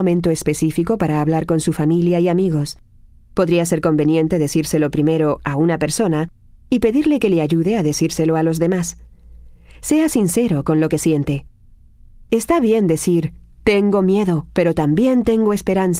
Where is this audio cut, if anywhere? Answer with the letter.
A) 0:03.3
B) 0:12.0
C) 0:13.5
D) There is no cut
D